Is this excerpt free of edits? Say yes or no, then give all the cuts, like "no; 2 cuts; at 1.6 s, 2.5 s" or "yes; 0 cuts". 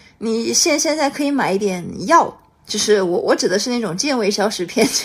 yes; 0 cuts